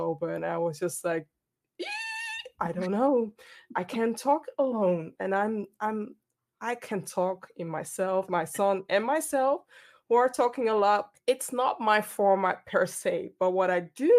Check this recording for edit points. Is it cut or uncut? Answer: cut